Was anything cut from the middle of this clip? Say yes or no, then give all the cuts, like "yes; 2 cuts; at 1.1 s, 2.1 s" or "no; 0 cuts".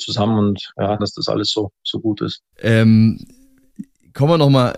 yes; 2 cuts; at 1.0 s, 2.5 s